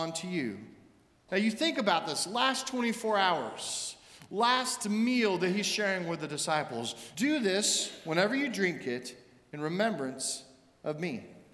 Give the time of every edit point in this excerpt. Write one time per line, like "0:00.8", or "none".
0:01.3
0:07.1